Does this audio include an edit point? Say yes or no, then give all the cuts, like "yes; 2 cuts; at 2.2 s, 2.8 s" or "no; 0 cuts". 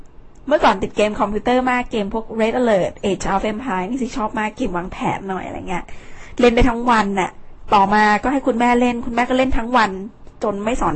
no; 0 cuts